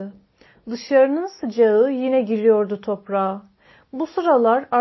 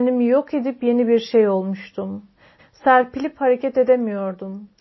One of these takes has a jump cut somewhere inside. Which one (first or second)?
second